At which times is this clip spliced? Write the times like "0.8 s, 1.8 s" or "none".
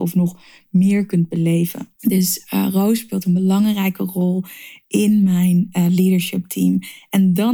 2.0 s

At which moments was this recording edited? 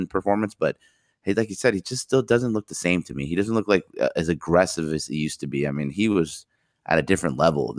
none

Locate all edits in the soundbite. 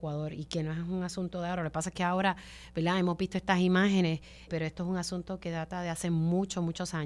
4.5 s

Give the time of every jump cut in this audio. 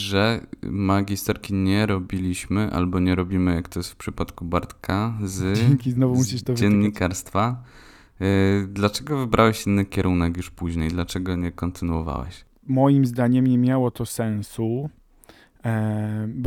none

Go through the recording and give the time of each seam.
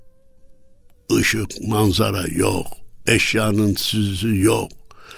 none

